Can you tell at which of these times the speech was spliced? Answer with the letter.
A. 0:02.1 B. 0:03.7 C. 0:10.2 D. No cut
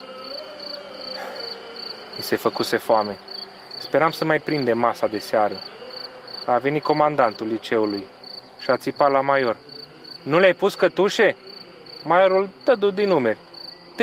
C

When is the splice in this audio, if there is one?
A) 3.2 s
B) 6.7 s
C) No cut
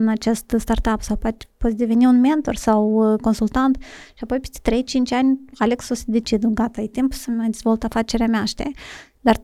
C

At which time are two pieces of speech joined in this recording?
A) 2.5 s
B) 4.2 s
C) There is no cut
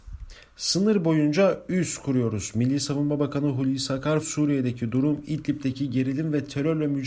B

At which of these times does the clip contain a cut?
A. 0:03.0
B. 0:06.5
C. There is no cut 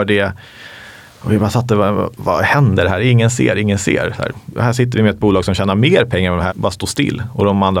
B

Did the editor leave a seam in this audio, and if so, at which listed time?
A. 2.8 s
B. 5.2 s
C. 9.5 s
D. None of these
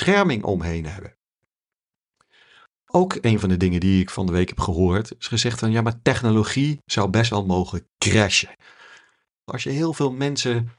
C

